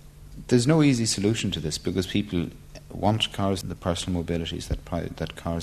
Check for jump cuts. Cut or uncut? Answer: cut